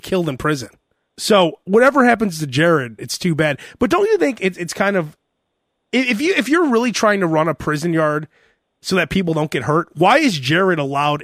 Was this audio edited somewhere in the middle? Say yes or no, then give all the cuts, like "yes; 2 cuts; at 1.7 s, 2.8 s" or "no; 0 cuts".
yes; 2 cuts; at 1.1 s, 3.0 s